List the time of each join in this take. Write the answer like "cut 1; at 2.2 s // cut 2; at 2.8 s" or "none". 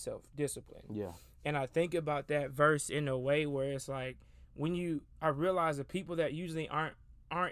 none